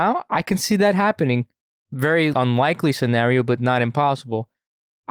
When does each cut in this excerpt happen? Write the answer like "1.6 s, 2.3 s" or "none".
2.3 s